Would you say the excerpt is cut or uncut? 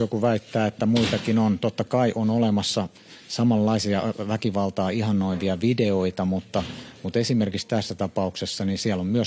uncut